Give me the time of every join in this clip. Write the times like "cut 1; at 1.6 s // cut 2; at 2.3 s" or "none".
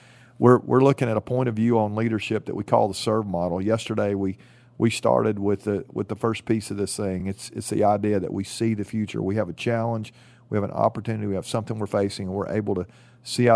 none